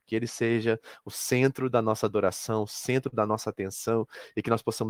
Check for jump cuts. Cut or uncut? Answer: uncut